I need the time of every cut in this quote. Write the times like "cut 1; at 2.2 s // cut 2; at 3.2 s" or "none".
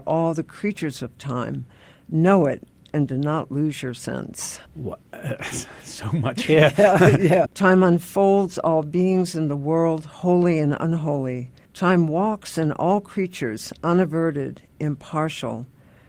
cut 1; at 4.7 s // cut 2; at 7.5 s // cut 3; at 11.6 s